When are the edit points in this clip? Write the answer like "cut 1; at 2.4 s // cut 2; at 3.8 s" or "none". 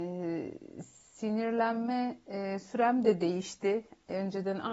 none